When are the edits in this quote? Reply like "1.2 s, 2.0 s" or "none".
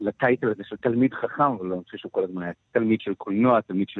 2.5 s